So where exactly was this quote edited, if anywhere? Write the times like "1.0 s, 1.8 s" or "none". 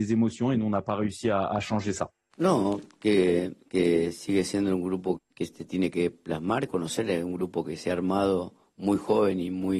2.3 s, 5.2 s

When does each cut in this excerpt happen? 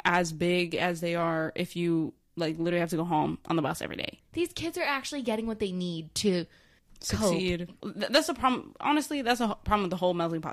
4.2 s, 7.8 s

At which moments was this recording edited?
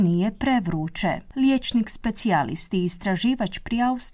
none

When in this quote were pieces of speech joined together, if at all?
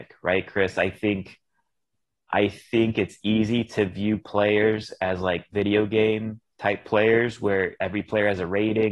none

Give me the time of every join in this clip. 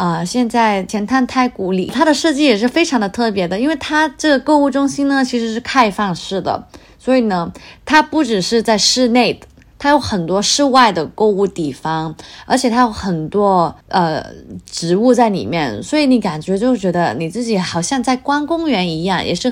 13.8 s

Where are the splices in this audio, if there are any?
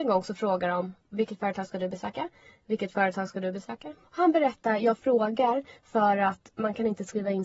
1.0 s, 4.0 s

